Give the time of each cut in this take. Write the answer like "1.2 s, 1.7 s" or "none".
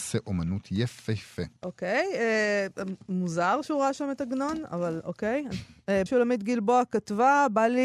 1.6 s, 6.1 s